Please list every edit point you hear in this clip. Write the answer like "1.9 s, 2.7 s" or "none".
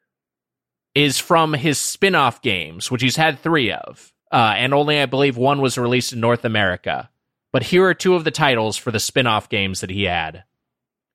4.2 s